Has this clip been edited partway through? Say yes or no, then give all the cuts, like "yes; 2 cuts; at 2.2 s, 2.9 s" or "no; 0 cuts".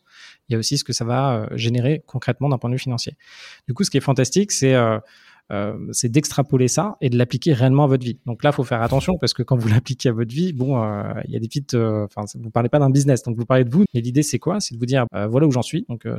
yes; 2 cuts; at 13.9 s, 15.1 s